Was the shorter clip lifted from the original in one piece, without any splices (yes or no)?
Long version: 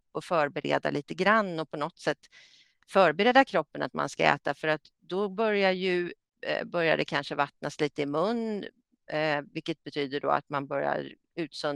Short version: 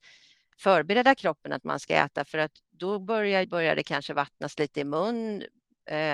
no